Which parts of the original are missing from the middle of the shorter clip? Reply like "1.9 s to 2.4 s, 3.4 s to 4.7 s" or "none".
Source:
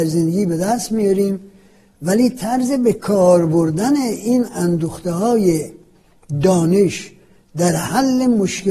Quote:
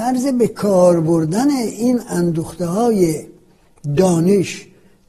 none